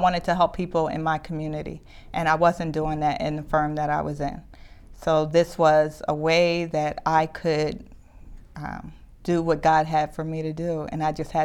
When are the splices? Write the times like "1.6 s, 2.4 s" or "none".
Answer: none